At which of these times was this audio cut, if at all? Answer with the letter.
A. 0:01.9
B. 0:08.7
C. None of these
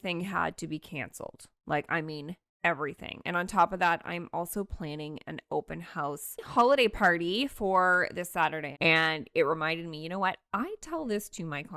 B